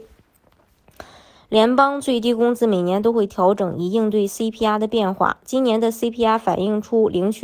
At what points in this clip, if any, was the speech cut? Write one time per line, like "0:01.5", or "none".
none